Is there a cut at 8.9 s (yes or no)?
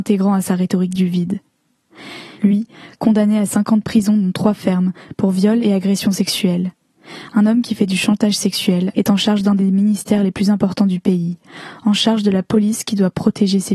yes